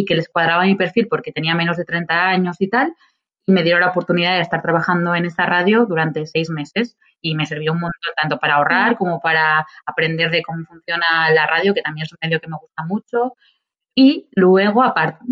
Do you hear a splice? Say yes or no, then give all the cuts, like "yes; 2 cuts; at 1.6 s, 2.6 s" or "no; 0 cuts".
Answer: no; 0 cuts